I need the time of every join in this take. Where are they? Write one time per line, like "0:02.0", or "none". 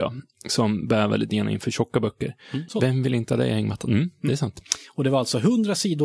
0:02.7